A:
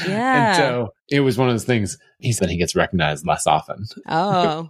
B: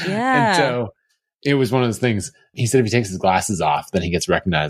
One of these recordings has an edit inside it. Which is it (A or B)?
A